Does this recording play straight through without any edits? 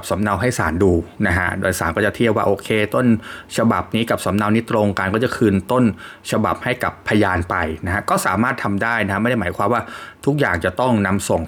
no; 1 cut; at 1.1 s

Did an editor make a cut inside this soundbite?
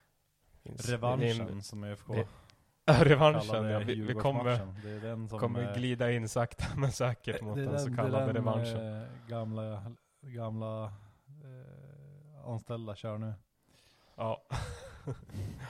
no; 0 cuts

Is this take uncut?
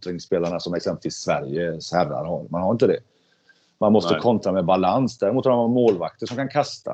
yes; 0 cuts

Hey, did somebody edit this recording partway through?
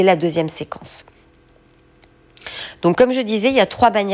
no; 0 cuts

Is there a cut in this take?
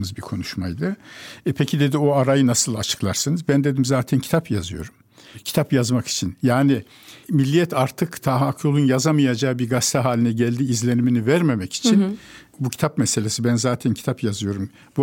no; 0 cuts

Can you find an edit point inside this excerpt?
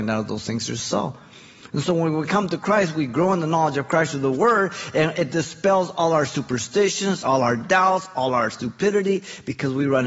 no; 0 cuts

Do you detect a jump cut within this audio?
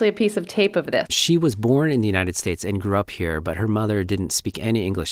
yes; 1 cut; at 1.1 s

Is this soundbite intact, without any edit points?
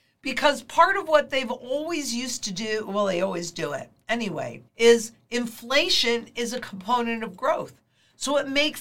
no; 1 cut; at 4.7 s

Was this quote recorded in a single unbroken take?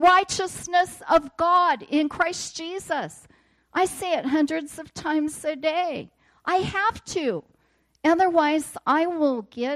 yes; 0 cuts

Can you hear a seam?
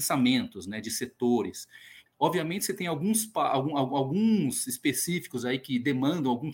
yes; 1 cut; at 2.1 s

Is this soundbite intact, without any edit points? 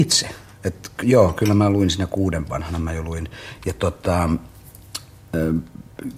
no; 2 cuts; at 1.0 s, 3.6 s

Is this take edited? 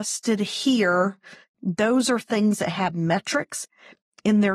yes; 1 cut; at 1.5 s

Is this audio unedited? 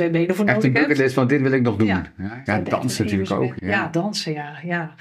no; 2 cuts; at 2.5 s, 3.6 s

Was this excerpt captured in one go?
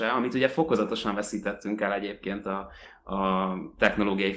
yes; 0 cuts

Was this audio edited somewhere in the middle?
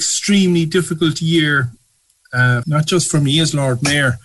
yes; 1 cut; at 2.6 s

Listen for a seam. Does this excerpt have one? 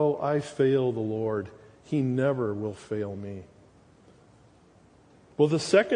no; 0 cuts

